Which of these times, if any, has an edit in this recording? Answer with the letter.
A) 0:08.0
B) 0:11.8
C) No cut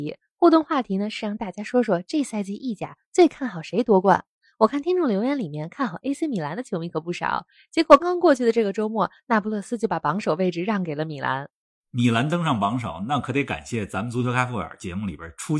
A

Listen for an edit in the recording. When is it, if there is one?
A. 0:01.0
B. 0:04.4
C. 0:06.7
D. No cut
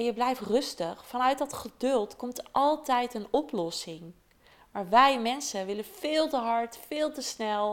D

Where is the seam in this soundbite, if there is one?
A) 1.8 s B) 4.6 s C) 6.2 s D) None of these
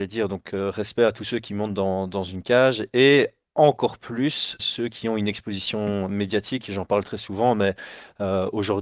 B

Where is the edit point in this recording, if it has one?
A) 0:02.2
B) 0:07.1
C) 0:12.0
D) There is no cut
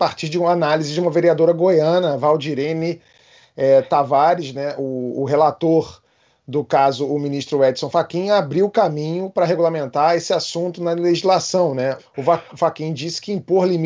C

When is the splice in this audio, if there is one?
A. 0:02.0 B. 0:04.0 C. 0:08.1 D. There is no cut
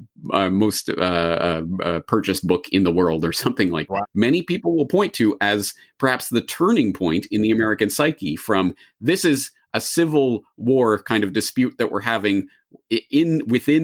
B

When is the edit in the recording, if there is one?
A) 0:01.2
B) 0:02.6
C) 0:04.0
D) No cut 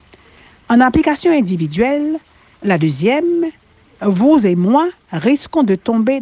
D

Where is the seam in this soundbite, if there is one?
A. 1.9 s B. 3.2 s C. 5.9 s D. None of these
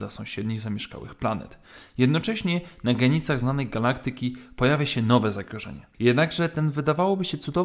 C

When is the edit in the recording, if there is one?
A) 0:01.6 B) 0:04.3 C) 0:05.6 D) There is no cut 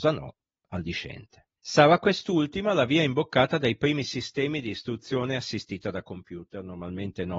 A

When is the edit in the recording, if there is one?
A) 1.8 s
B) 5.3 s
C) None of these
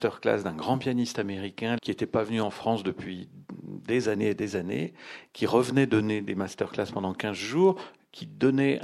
A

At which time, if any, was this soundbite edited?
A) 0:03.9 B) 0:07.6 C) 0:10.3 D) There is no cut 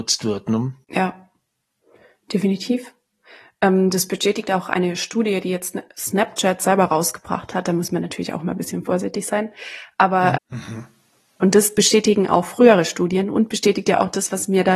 C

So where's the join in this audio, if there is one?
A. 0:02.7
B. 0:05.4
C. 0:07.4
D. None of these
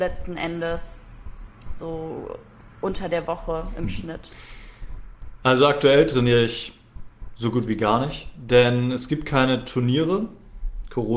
D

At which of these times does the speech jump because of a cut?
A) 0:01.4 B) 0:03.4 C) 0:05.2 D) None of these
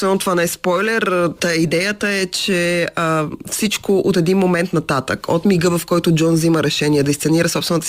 A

